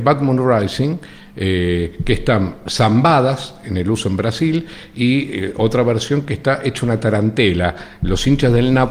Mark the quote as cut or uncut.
uncut